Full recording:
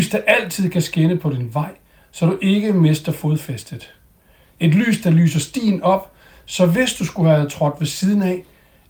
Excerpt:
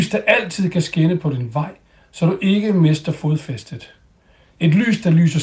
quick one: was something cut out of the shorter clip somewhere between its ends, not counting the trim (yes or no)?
no